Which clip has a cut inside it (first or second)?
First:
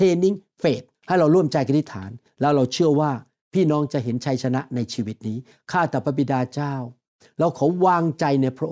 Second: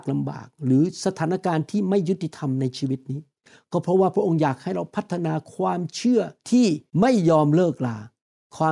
second